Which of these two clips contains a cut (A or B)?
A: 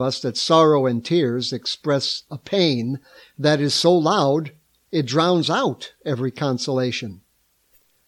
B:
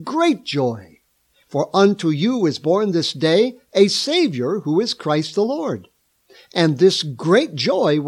B